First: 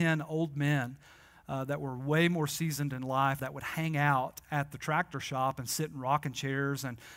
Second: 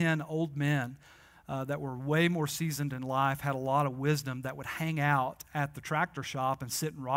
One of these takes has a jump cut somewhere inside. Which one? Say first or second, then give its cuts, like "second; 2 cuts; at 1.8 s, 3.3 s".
first; 1 cut; at 3.4 s